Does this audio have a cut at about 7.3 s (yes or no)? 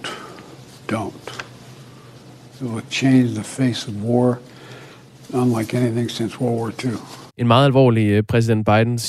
yes